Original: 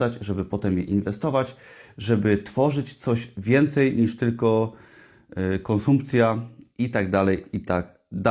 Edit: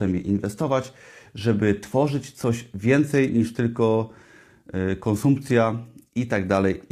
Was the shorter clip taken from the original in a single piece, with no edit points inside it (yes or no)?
yes